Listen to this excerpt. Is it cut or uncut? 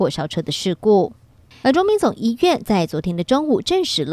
cut